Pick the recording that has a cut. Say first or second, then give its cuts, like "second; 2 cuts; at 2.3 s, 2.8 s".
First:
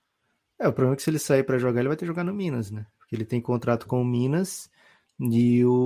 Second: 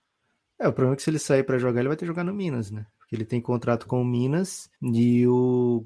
second; 1 cut; at 4.7 s